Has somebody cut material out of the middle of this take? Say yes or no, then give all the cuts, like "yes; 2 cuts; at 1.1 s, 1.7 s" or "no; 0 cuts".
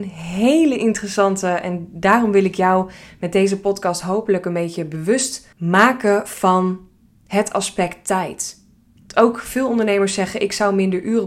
yes; 2 cuts; at 5.5 s, 9.0 s